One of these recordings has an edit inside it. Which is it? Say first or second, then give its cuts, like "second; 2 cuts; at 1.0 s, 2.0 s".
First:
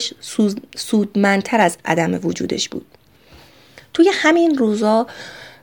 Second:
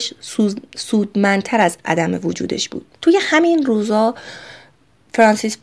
second; 1 cut; at 2.9 s